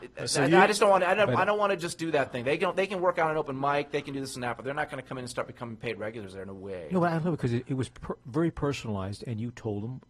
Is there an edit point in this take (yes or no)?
no